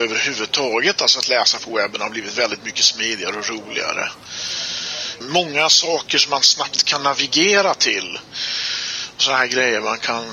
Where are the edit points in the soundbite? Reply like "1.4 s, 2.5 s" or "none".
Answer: 5.2 s